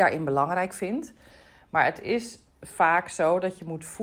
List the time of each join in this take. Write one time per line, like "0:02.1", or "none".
none